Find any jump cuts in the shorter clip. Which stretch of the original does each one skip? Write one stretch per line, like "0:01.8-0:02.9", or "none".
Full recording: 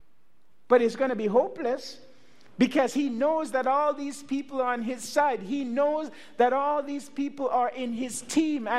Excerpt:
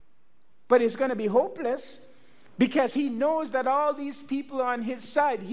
none